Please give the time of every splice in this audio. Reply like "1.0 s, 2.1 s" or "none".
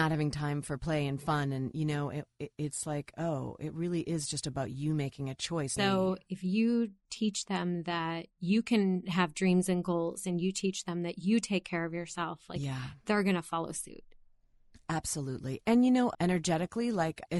5.8 s, 16.1 s